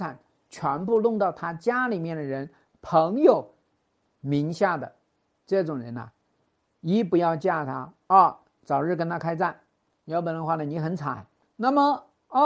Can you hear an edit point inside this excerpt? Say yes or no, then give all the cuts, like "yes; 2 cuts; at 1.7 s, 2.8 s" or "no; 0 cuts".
no; 0 cuts